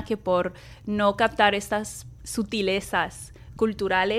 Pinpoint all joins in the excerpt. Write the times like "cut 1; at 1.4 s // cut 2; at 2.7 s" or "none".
cut 1; at 2.2 s